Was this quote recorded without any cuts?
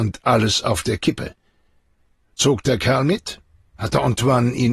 yes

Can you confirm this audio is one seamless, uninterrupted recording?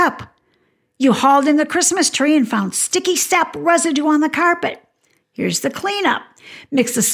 yes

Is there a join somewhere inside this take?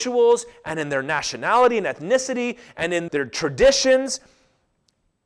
yes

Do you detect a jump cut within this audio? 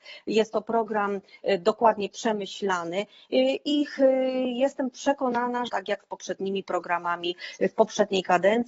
yes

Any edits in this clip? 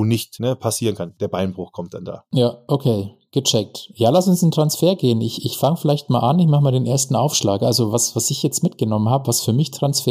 no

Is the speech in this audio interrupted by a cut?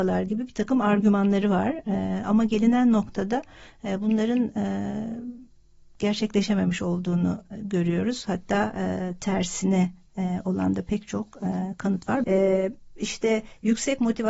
yes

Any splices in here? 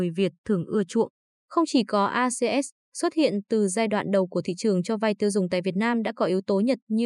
no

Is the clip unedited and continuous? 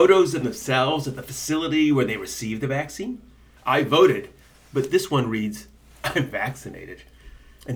no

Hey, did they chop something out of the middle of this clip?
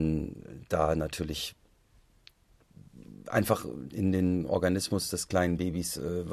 yes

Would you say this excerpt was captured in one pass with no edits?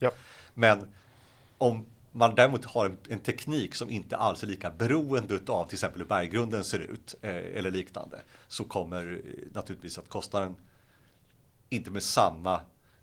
yes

